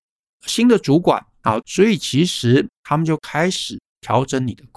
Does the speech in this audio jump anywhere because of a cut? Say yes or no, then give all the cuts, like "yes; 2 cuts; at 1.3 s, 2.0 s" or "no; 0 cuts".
yes; 1 cut; at 1.6 s